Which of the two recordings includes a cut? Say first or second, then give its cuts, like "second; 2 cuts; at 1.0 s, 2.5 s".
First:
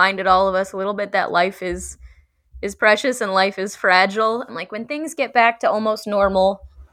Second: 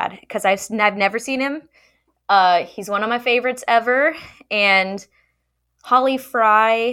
first; 1 cut; at 4.5 s